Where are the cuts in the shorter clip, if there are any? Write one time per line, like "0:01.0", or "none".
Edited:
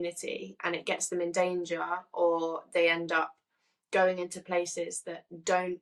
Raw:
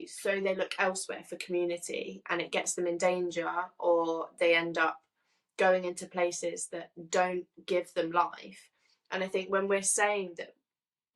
none